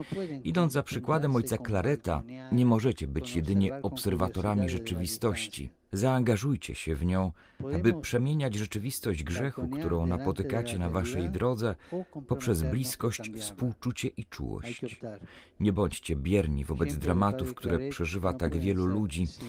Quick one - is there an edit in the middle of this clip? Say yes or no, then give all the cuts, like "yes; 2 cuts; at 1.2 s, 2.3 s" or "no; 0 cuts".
no; 0 cuts